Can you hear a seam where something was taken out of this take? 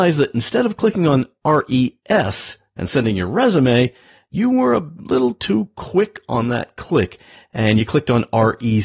no; 0 cuts

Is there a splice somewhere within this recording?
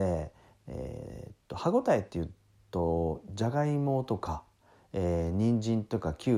no; 0 cuts

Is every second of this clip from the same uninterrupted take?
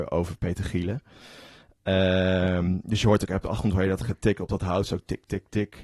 yes; 0 cuts

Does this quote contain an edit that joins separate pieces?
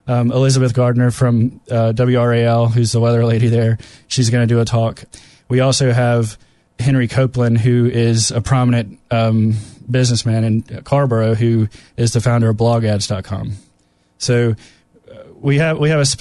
no; 0 cuts

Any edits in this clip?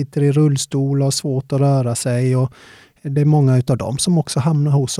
no; 0 cuts

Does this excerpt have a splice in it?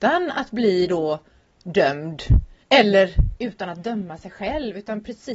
yes; 1 cut; at 2.6 s

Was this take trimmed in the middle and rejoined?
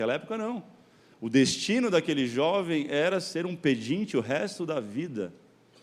no; 0 cuts

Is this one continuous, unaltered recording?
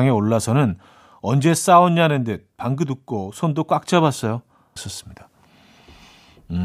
no; 1 cut; at 4.8 s

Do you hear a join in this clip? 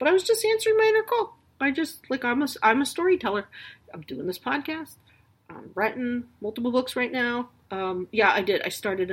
no; 0 cuts

